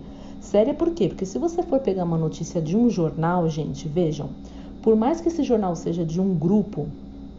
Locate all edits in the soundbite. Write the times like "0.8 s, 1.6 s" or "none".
none